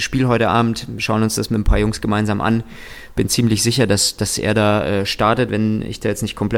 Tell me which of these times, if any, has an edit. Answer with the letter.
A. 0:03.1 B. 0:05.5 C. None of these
B